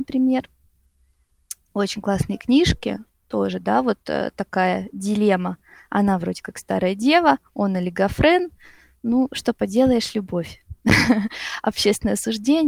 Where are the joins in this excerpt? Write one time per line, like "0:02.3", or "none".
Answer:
none